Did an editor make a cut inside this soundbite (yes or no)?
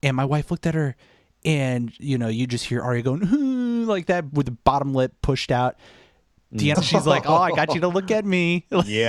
yes